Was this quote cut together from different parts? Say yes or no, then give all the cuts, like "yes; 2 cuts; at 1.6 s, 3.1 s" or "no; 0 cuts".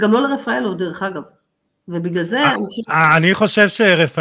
no; 0 cuts